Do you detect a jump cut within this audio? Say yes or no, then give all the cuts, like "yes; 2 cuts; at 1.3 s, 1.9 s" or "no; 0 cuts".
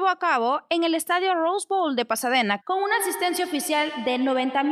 yes; 1 cut; at 2.6 s